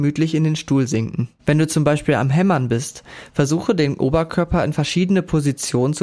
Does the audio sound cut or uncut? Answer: cut